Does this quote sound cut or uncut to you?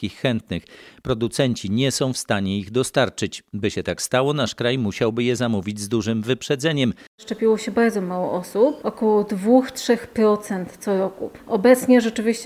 cut